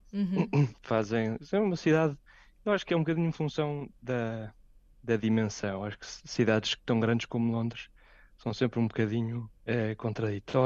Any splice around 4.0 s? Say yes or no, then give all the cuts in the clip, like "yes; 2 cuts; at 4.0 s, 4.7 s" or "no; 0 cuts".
no; 1 cut; at 9.6 s